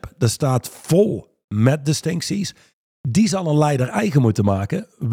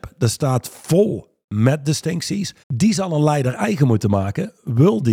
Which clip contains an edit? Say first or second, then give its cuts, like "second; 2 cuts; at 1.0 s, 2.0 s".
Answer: second; 1 cut; at 2.6 s